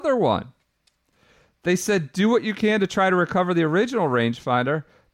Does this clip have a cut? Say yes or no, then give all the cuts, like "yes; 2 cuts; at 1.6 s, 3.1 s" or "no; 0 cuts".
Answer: no; 0 cuts